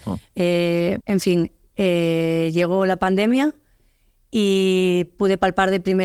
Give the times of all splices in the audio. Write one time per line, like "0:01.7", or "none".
0:01.0